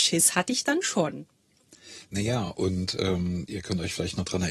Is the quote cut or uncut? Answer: uncut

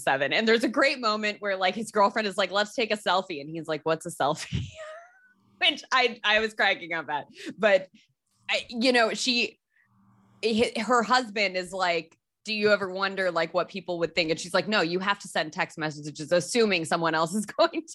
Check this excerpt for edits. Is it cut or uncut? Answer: uncut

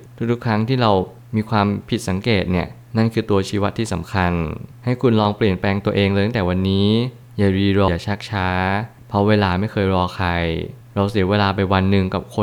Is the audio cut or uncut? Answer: cut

